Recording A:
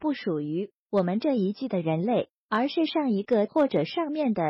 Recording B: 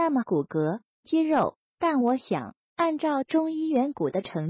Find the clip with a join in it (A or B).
B